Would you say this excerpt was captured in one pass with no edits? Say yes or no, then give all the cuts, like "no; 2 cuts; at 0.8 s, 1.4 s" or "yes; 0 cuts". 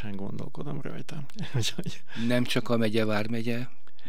yes; 0 cuts